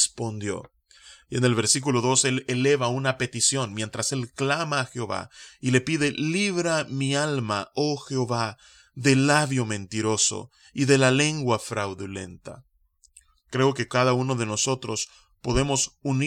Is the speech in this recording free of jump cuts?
yes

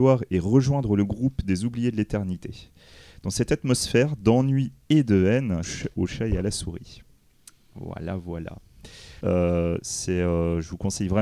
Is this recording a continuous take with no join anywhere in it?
no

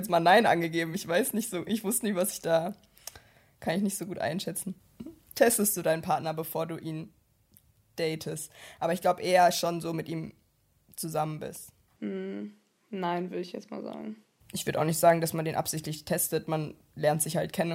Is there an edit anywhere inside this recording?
no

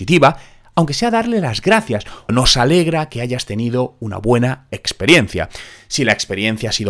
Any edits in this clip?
yes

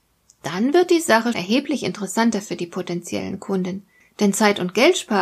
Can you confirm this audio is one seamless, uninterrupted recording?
no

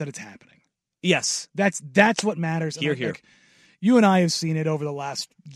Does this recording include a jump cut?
no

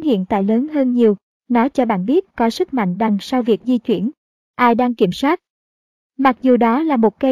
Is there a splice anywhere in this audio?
yes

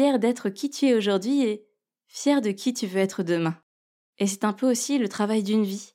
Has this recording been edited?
yes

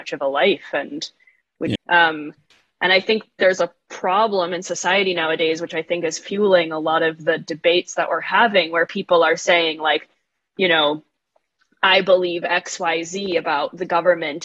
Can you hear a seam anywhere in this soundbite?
yes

